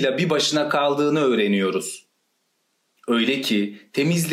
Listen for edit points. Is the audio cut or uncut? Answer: uncut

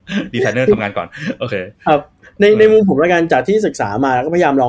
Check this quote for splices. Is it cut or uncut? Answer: uncut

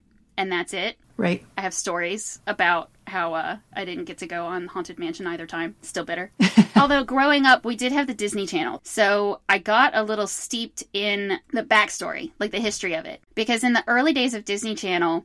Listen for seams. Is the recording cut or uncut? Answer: cut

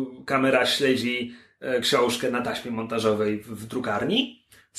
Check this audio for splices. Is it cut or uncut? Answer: uncut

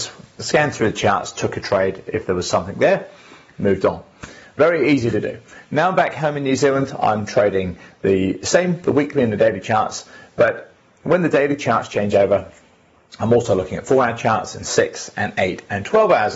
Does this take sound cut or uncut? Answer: uncut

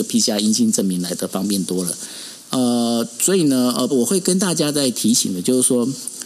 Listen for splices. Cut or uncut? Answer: cut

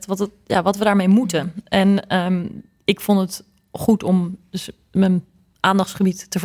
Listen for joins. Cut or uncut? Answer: uncut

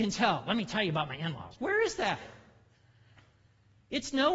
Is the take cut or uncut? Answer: cut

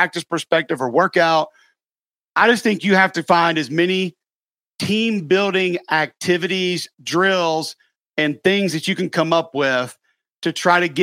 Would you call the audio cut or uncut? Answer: uncut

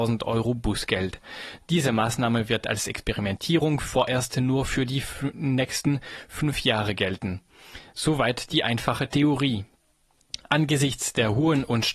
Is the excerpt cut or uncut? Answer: uncut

